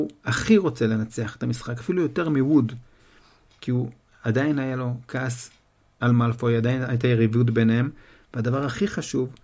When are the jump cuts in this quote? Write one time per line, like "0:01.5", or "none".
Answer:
none